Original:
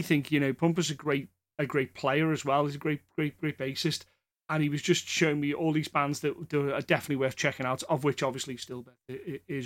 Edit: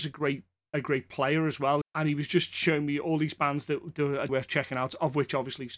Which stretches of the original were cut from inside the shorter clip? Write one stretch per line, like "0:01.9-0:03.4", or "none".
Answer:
0:02.7-0:04.4
0:06.8-0:07.2

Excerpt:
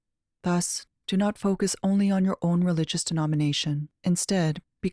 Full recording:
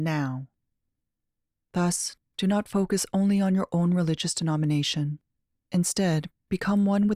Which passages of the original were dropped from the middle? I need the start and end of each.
0:05.3-0:05.6

